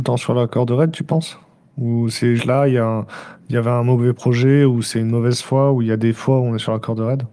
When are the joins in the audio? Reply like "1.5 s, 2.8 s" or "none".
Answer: 2.4 s